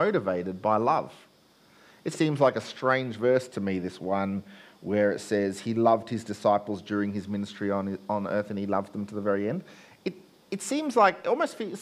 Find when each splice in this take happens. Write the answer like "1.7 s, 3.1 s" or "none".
2.1 s